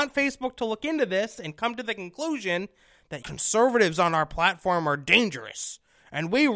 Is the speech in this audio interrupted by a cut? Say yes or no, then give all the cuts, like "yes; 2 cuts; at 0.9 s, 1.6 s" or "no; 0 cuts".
yes; 1 cut; at 3.2 s